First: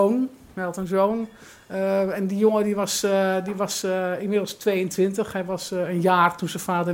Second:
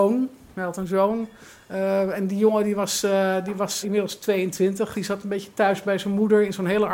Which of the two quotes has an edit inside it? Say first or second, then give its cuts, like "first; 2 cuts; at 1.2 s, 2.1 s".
second; 2 cuts; at 3.8 s, 4.9 s